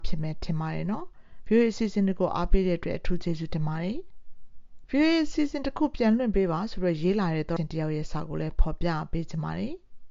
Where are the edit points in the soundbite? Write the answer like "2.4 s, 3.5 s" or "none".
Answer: 7.6 s